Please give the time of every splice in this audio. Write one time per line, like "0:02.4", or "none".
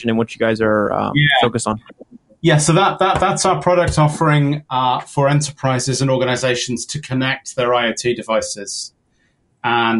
none

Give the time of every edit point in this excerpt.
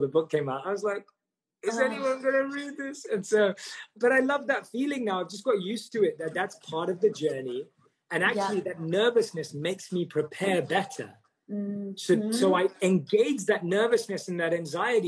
none

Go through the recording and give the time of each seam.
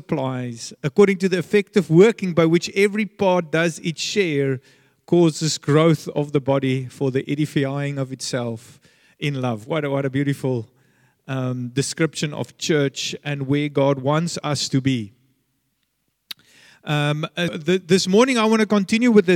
0:17.5

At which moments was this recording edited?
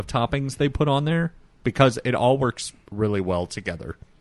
none

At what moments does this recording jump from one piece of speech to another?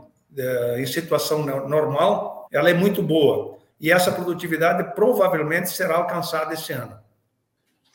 0:02.5
0:03.7

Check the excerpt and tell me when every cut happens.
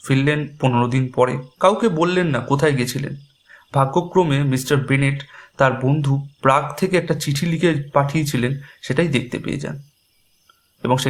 0:01.5

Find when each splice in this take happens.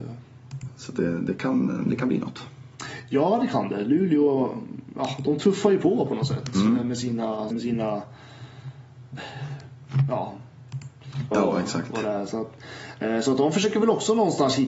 0:07.5
0:11.3

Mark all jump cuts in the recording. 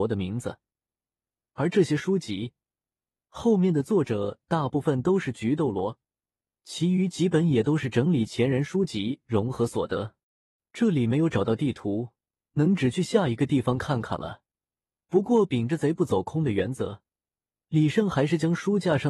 0:10.6

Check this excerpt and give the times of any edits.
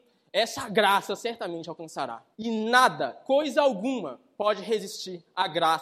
0:02.3

